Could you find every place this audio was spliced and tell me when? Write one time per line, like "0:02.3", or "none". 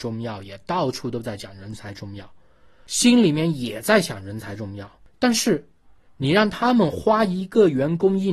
none